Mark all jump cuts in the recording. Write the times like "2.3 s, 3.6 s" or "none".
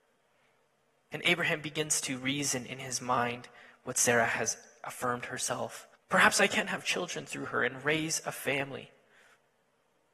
6.0 s